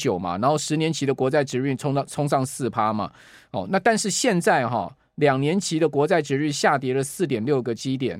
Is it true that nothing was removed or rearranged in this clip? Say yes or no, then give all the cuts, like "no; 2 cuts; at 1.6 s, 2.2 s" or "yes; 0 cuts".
yes; 0 cuts